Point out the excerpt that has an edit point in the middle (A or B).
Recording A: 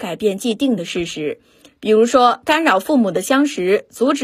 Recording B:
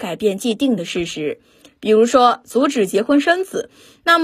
B